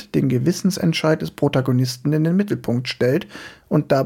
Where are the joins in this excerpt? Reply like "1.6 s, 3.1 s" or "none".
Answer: none